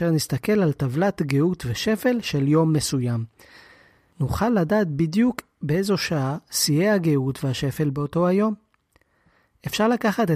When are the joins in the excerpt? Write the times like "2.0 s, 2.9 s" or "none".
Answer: none